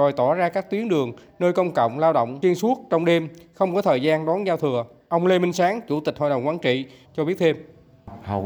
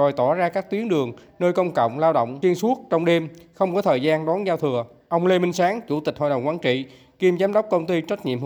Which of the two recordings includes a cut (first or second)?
first